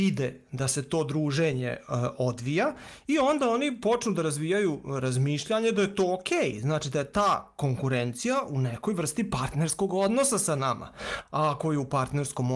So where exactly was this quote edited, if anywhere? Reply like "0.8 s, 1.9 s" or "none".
none